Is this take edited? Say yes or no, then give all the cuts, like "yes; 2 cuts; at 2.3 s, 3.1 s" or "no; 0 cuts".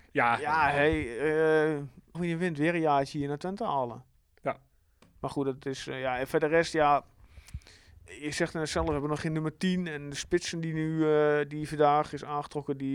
yes; 1 cut; at 2.1 s